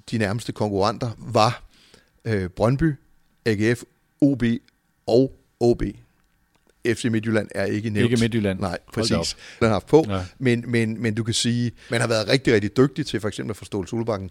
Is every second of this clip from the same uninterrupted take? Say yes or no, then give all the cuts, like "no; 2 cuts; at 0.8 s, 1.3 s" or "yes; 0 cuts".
no; 2 cuts; at 9.6 s, 11.9 s